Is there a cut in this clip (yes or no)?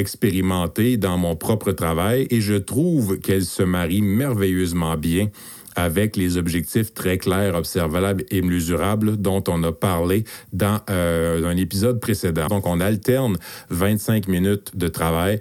yes